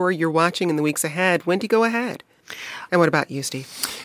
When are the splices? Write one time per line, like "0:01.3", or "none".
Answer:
0:02.9